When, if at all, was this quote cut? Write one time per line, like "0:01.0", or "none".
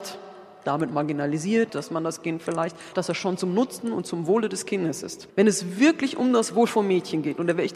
0:01.7
0:02.9
0:05.3